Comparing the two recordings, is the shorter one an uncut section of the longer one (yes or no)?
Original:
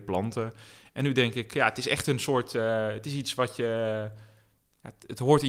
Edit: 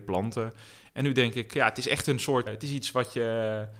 no